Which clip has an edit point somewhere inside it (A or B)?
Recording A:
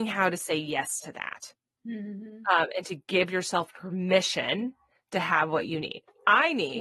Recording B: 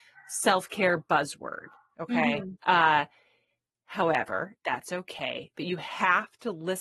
B